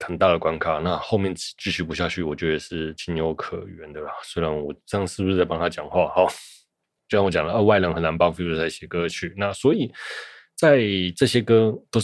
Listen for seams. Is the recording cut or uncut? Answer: uncut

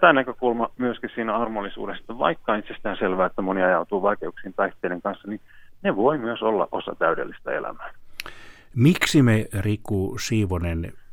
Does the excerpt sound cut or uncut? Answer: uncut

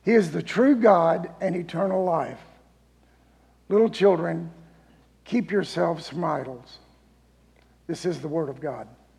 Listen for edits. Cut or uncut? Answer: uncut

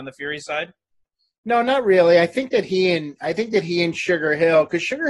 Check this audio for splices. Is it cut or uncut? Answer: uncut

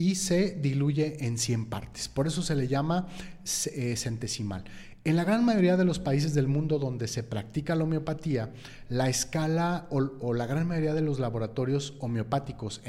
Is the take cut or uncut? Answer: uncut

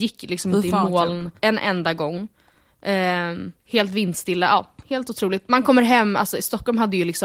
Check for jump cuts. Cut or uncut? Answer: cut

